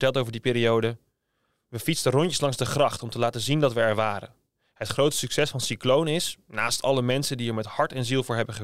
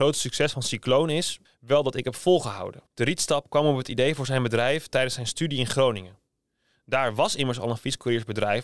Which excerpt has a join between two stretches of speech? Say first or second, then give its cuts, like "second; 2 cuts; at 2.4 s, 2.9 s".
second; 2 cuts; at 1.4 s, 2.9 s